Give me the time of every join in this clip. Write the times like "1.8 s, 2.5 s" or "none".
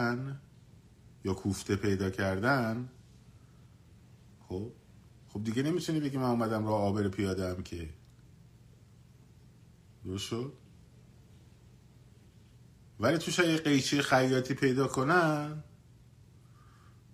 none